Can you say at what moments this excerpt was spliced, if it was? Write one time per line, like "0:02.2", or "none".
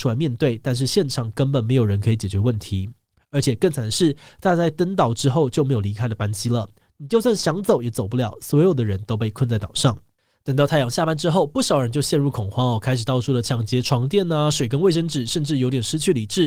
none